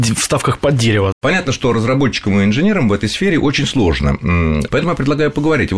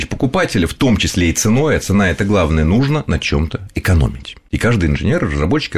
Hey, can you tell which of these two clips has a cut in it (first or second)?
first